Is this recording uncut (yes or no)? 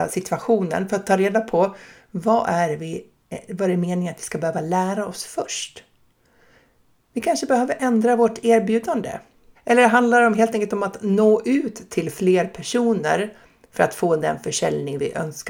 no